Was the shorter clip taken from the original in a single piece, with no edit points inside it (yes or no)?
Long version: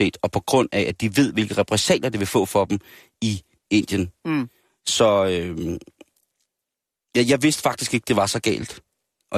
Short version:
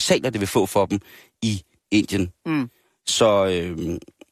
yes